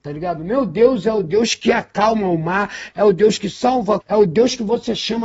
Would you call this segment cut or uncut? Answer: cut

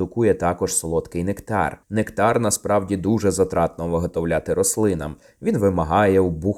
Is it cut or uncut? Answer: uncut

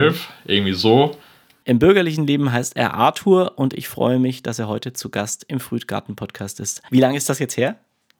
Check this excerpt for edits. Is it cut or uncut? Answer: cut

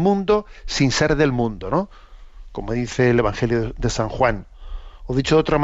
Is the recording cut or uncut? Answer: uncut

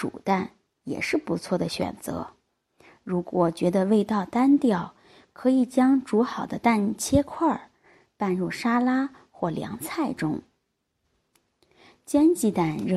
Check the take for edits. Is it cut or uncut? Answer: uncut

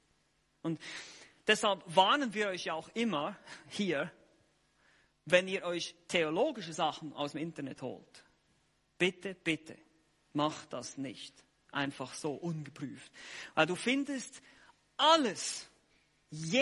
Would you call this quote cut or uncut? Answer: uncut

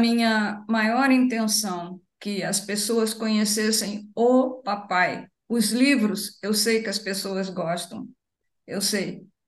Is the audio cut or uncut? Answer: uncut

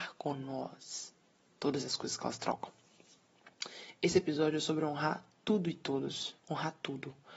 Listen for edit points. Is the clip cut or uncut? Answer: cut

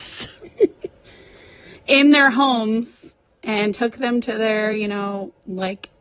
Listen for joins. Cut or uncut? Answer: uncut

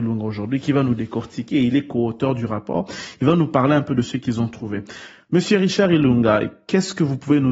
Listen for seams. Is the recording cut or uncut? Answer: uncut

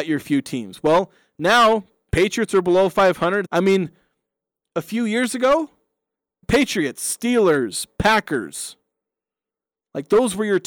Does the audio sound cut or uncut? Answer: cut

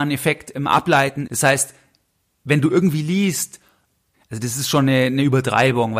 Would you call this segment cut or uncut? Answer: cut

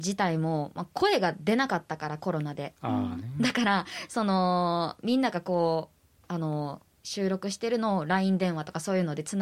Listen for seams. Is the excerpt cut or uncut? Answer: uncut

